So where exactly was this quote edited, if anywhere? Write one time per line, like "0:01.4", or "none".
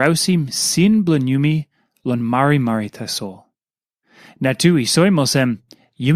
none